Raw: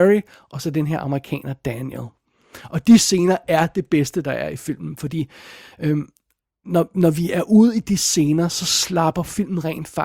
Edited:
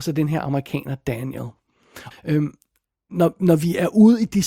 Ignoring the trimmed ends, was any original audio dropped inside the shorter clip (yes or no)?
yes